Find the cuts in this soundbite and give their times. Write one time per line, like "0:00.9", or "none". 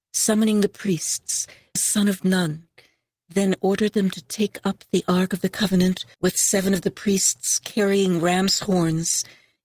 0:01.8
0:06.1